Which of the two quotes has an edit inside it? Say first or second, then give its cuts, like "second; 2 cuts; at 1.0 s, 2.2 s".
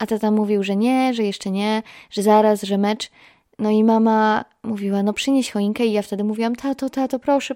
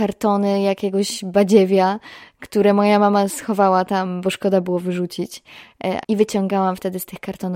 second; 1 cut; at 6.0 s